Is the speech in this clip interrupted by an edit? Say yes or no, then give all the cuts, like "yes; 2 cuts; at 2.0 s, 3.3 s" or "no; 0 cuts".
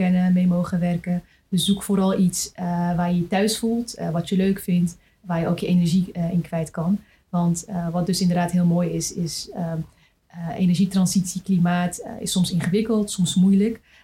no; 0 cuts